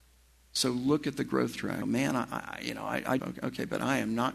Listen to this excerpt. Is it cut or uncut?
cut